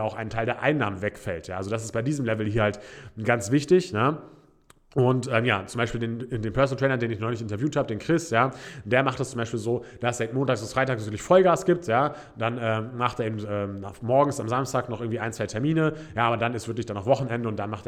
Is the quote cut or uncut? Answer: uncut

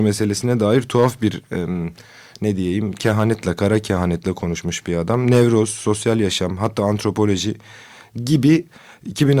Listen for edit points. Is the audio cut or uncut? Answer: uncut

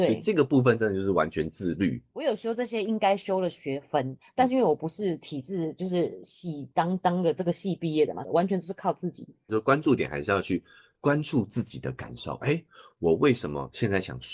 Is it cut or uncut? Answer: cut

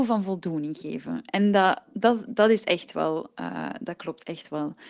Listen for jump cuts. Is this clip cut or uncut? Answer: uncut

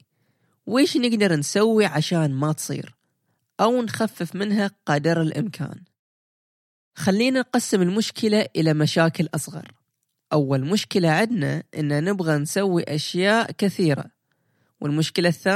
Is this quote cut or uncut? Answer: uncut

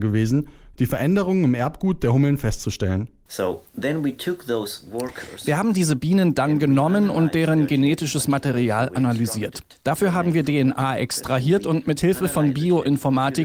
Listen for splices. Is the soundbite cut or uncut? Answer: uncut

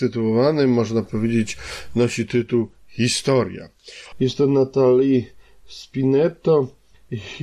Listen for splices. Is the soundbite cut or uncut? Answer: cut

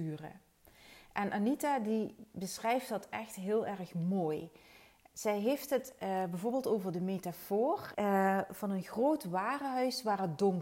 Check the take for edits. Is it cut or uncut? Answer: cut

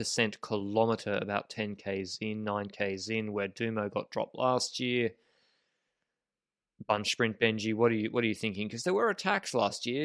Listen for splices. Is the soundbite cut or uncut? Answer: uncut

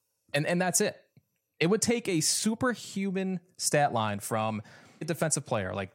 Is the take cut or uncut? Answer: cut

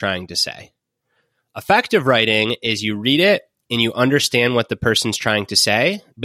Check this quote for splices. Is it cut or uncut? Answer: uncut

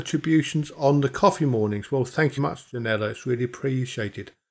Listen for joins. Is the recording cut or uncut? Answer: cut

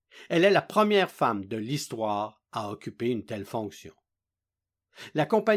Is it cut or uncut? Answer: uncut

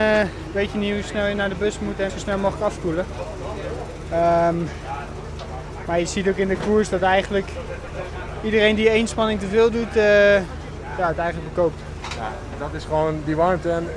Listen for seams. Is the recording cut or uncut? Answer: cut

